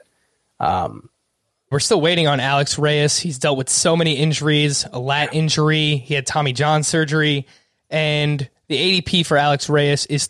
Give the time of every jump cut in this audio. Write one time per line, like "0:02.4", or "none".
0:01.7